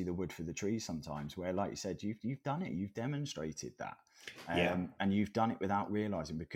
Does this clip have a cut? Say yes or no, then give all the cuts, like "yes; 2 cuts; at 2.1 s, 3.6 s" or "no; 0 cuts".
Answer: no; 0 cuts